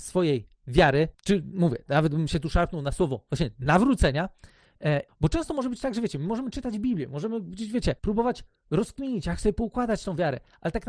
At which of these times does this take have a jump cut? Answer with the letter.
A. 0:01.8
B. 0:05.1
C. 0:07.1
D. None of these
B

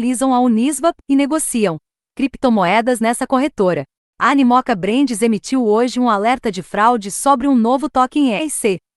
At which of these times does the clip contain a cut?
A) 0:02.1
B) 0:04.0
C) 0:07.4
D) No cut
B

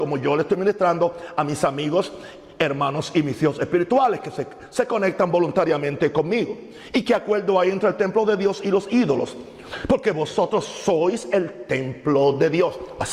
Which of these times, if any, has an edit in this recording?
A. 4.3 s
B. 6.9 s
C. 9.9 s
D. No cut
D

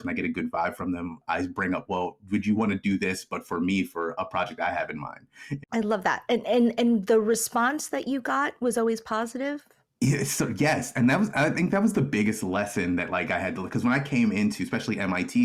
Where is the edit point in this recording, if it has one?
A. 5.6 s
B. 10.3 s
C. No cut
A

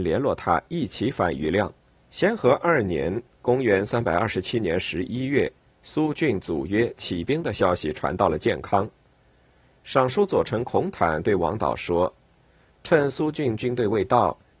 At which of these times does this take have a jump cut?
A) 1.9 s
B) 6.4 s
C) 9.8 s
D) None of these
A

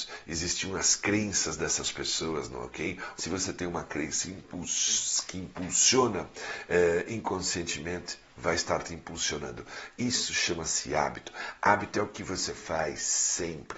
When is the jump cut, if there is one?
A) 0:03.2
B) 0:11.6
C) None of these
A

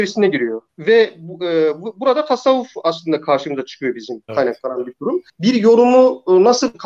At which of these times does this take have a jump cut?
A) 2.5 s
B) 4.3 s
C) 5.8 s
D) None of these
B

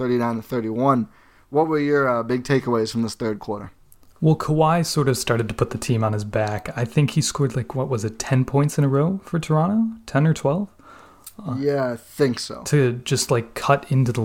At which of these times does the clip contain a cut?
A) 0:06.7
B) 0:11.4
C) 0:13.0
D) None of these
D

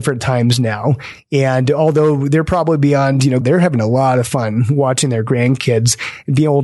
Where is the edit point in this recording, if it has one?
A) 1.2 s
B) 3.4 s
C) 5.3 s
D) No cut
B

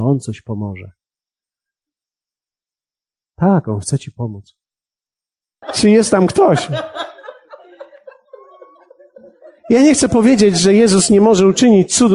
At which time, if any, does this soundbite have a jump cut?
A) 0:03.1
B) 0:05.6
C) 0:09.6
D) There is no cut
B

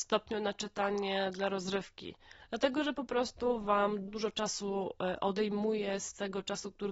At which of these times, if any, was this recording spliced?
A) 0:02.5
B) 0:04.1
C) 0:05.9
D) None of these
B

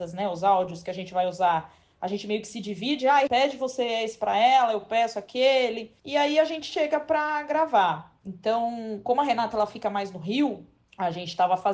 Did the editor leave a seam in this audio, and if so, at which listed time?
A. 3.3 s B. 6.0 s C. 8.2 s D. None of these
A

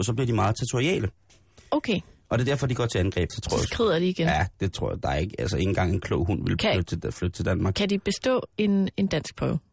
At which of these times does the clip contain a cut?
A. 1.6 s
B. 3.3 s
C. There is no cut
B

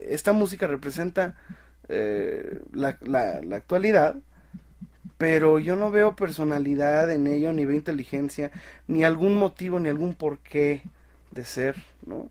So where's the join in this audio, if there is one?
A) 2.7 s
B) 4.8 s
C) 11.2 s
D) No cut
D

